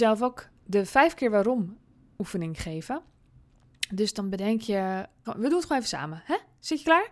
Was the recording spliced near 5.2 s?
yes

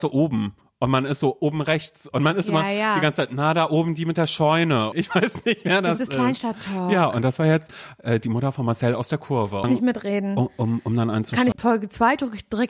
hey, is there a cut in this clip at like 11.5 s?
yes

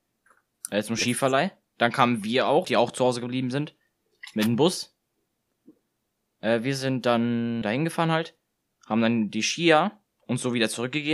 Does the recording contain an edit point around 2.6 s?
yes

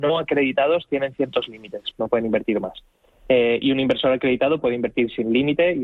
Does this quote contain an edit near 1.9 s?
yes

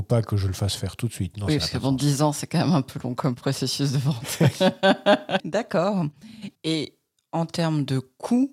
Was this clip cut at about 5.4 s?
yes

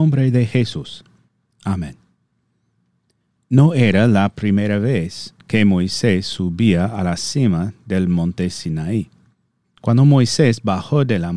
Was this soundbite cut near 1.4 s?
no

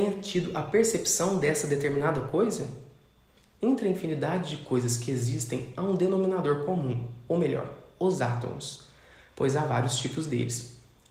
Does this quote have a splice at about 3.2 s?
no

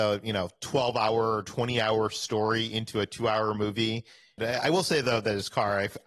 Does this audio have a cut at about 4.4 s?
yes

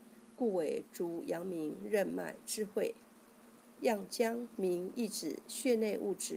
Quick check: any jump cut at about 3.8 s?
yes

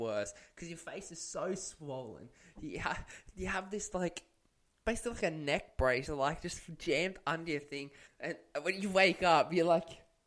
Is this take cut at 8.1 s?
yes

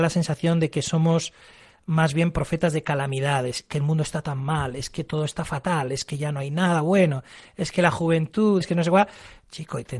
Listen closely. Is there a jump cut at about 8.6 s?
yes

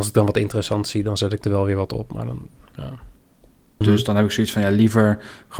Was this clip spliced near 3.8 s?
yes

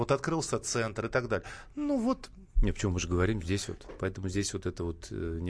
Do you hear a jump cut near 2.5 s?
no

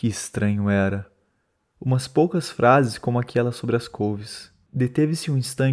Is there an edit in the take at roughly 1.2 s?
no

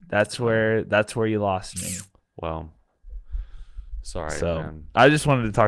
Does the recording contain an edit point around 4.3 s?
no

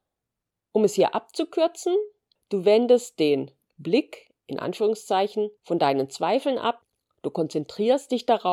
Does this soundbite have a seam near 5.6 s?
yes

